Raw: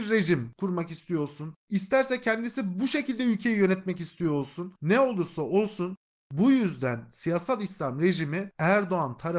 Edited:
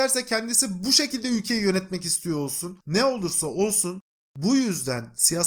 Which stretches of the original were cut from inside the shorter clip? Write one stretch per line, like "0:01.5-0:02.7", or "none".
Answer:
none